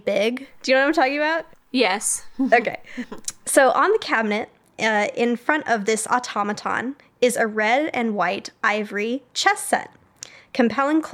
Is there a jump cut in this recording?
no; 0 cuts

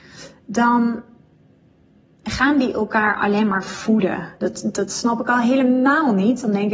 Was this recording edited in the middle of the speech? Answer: yes; 1 cut; at 4.4 s

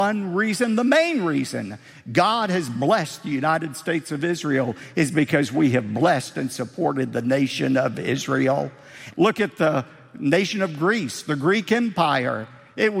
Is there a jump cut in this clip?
yes; 1 cut; at 9.1 s

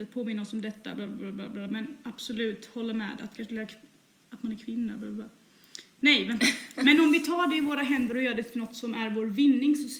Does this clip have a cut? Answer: no; 0 cuts

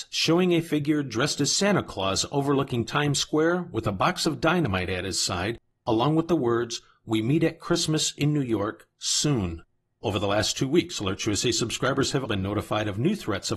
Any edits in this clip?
yes; 1 cut; at 12.3 s

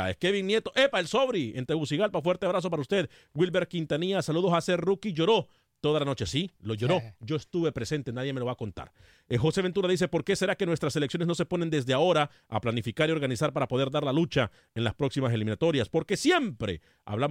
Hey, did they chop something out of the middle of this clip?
no; 0 cuts

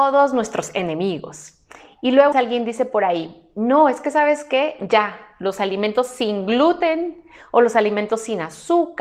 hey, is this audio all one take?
no; 1 cut; at 2.3 s

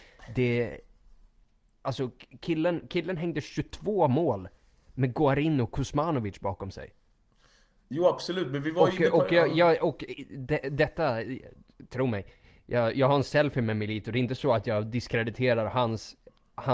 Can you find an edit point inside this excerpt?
no; 0 cuts

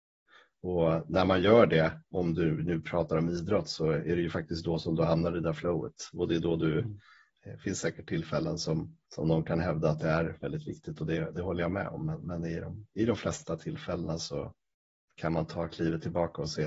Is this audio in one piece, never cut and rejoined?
no; 2 cuts; at 7.3 s, 9.1 s

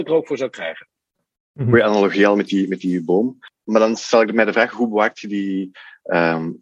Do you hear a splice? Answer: no; 0 cuts

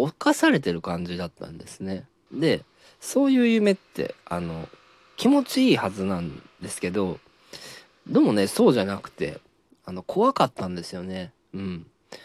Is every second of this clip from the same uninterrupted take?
no; 1 cut; at 2.3 s

